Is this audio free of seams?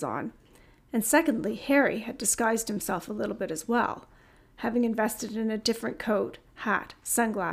yes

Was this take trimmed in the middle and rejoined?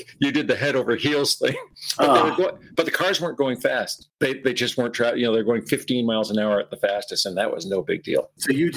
no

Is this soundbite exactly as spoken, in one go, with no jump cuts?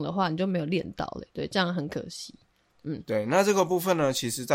yes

